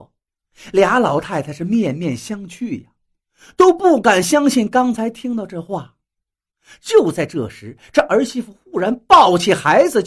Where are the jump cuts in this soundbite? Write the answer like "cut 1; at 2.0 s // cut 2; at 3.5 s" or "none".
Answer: none